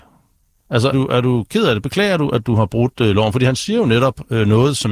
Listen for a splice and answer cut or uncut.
cut